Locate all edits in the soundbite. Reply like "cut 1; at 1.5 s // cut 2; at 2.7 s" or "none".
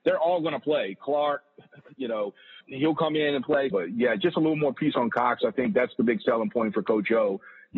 cut 1; at 2.6 s // cut 2; at 3.7 s